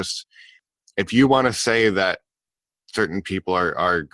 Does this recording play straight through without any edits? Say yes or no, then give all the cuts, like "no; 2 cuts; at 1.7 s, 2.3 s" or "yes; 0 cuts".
yes; 0 cuts